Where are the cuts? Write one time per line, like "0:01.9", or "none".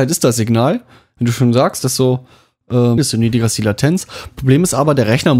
0:03.0